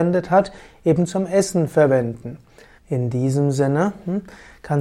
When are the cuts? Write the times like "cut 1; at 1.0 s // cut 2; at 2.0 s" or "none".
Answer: cut 1; at 2.8 s